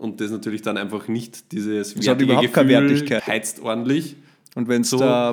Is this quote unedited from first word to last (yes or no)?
no